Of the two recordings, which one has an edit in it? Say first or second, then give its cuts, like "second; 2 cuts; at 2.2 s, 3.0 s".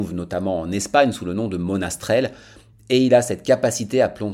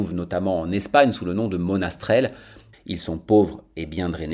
second; 1 cut; at 2.7 s